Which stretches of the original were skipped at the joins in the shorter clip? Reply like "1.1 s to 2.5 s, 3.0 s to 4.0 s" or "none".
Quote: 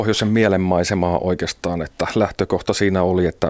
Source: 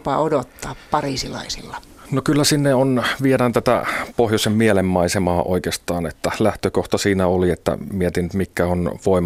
none

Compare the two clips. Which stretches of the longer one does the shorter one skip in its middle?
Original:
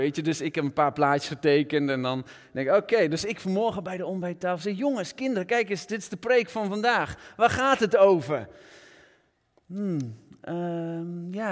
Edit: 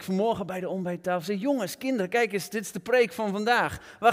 none

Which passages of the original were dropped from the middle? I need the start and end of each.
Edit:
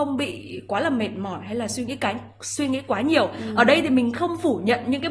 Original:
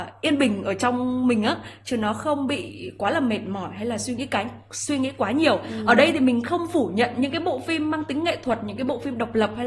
none

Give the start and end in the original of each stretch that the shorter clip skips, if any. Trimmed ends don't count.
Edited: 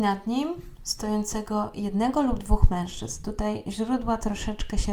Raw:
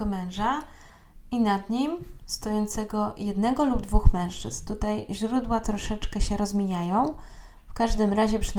none

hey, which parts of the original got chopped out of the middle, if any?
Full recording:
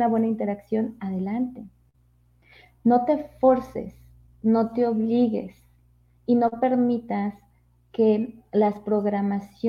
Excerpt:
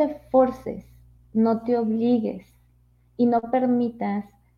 none

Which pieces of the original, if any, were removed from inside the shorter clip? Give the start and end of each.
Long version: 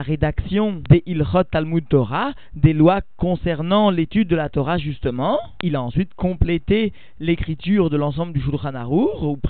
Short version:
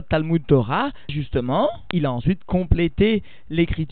2.5 s to 4.8 s

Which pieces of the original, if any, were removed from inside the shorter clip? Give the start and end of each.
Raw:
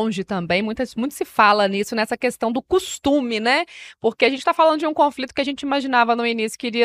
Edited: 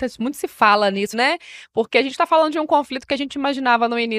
1.9 s to 3.4 s

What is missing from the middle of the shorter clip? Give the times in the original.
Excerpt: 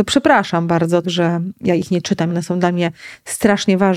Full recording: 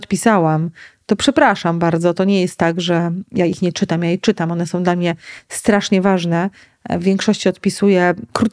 2.2 s to 2.7 s, 4.0 s to 4.5 s

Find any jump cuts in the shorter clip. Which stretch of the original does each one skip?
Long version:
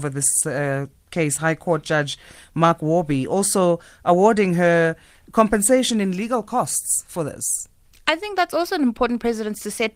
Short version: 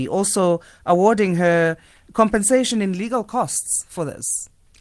none

